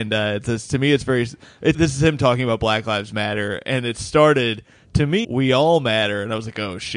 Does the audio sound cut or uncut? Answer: cut